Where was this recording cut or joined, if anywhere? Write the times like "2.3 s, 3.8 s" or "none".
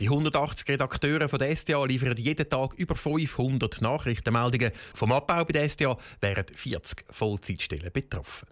4.9 s